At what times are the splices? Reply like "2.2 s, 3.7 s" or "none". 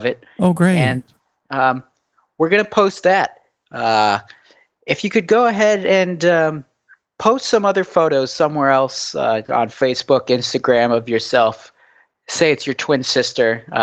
none